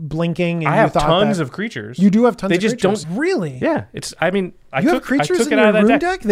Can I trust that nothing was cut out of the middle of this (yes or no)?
no